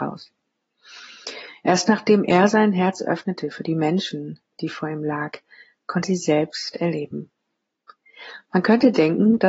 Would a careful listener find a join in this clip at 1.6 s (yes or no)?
no